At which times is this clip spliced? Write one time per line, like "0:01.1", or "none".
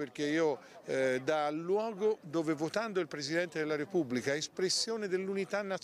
none